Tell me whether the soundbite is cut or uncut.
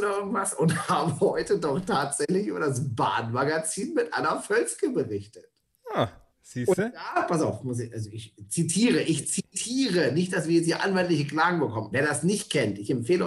cut